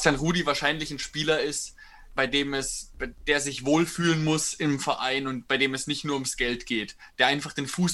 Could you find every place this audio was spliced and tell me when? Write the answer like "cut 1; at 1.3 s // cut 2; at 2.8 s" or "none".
cut 1; at 2.2 s